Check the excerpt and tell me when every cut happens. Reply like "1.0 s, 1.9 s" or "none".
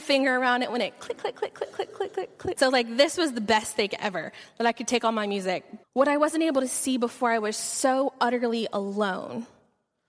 2.6 s, 5.8 s